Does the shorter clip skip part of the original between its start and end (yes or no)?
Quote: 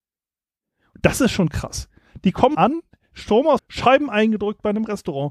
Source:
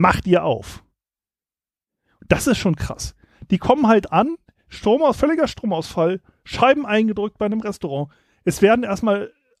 yes